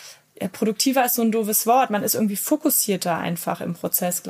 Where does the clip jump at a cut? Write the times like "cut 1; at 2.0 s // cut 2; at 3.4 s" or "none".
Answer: none